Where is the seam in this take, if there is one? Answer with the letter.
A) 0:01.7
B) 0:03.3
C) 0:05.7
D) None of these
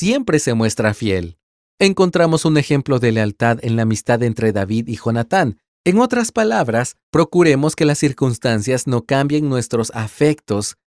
C